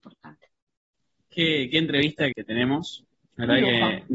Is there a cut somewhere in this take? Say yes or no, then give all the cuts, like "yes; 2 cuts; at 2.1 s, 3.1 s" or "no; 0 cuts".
yes; 2 cuts; at 1.3 s, 2.3 s